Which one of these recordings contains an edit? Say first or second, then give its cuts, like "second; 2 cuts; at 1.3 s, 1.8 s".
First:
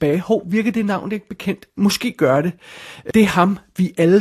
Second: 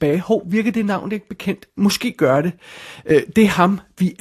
first; 1 cut; at 3.1 s